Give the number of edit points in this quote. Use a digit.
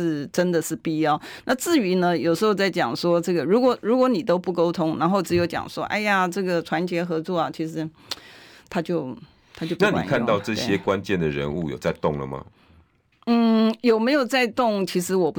0